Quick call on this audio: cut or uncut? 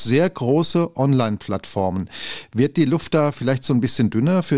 uncut